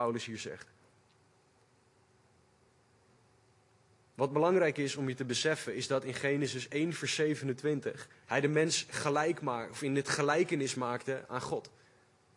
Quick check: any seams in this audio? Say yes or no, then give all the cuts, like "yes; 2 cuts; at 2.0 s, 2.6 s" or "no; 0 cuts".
yes; 1 cut; at 8.2 s